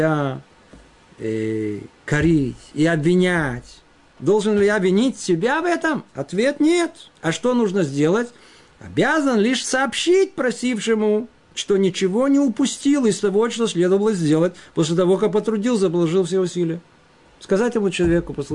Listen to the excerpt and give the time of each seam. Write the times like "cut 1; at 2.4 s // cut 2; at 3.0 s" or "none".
cut 1; at 4.1 s // cut 2; at 7.2 s